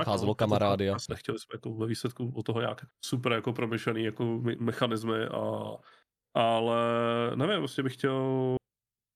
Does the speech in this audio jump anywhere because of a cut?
yes; 2 cuts; at 1.1 s, 2.9 s

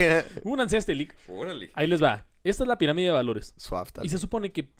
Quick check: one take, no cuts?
yes; 0 cuts

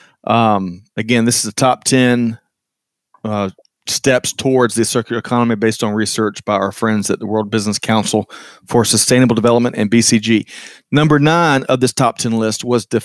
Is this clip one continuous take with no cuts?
yes; 0 cuts

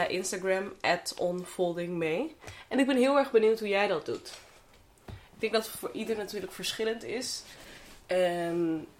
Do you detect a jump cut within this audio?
no; 0 cuts

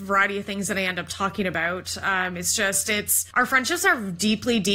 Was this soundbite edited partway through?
no; 0 cuts

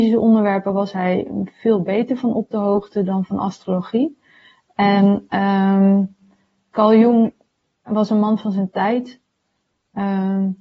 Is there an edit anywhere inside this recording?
yes; 1 cut; at 6.7 s

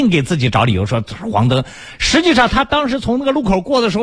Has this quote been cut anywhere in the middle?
no; 0 cuts

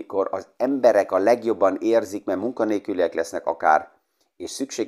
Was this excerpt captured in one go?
yes; 0 cuts

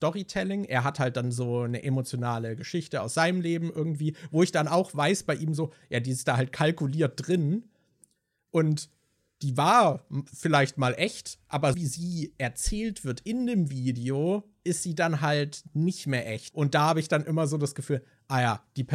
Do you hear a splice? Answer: yes; 2 cuts; at 11.7 s, 16.5 s

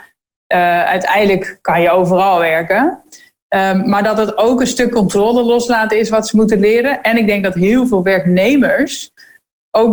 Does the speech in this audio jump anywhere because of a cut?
no; 0 cuts

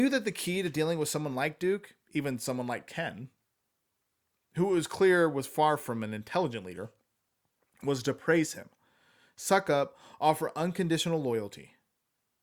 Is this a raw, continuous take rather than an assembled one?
yes; 0 cuts

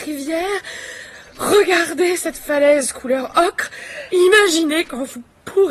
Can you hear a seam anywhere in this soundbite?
yes; 1 cut; at 4.1 s

